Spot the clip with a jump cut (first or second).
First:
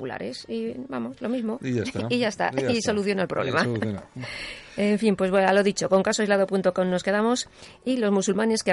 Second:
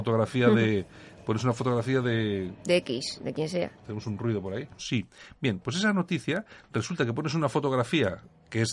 second